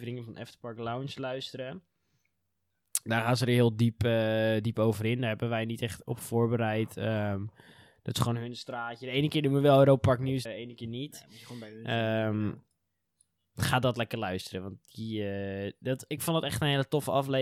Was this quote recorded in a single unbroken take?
no; 1 cut; at 10.5 s

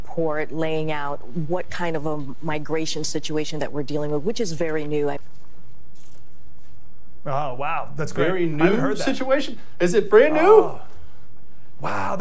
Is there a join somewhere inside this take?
no; 0 cuts

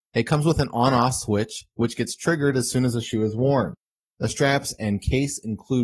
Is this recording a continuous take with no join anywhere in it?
yes; 0 cuts

